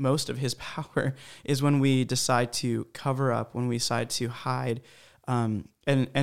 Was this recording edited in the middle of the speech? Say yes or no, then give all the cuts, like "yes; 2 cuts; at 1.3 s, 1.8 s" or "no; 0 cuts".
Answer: no; 0 cuts